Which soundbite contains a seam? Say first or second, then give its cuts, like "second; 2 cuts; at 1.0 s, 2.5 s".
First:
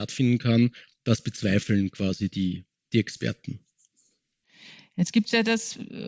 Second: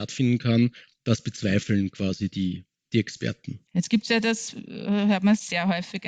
second; 1 cut; at 3.7 s